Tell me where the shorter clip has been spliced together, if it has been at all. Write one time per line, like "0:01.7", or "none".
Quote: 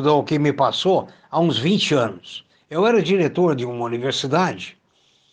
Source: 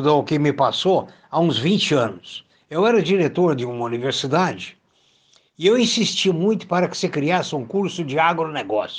none